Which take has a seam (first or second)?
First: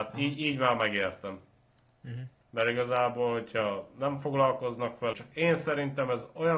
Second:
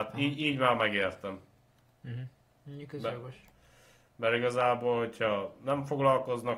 first